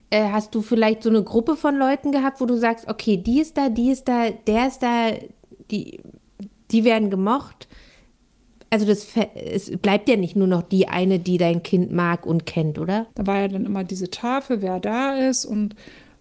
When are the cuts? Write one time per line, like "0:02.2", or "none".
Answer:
0:13.1